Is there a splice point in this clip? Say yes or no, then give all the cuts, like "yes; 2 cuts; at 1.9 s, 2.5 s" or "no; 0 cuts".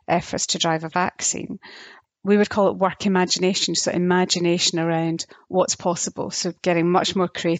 no; 0 cuts